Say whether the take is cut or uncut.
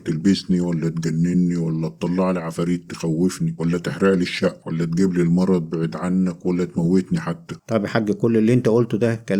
cut